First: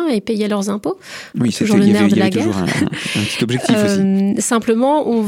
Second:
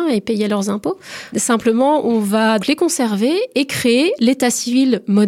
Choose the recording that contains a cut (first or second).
second